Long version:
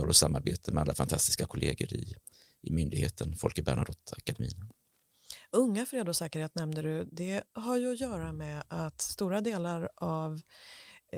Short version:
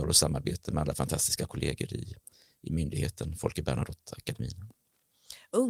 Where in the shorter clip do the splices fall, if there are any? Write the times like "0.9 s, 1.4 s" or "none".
none